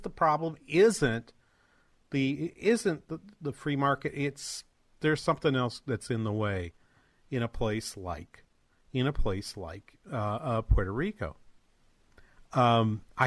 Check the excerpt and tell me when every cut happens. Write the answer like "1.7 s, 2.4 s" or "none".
none